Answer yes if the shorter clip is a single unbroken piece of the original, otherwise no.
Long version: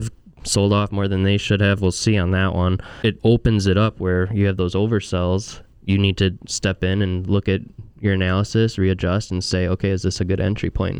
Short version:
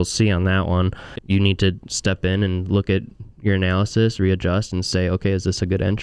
no